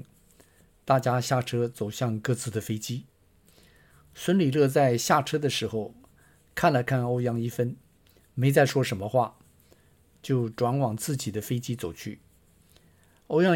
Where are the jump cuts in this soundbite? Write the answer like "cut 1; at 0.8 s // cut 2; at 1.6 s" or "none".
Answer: none